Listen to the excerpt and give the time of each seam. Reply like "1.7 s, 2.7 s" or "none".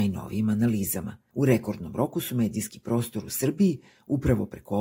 1.3 s